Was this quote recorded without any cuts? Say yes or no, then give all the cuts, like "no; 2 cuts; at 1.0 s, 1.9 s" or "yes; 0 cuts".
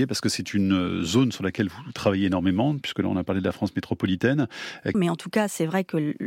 no; 1 cut; at 4.9 s